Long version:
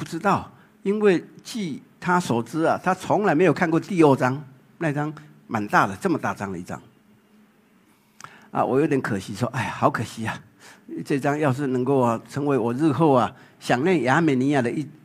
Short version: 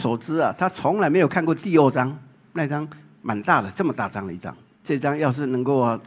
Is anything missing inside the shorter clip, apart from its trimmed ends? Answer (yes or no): yes